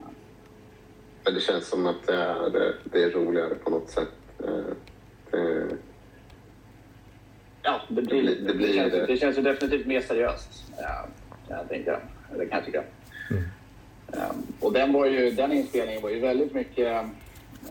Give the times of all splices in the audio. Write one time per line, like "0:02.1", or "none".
none